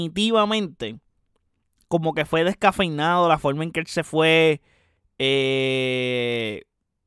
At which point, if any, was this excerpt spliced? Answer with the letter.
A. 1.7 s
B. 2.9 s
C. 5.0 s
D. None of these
D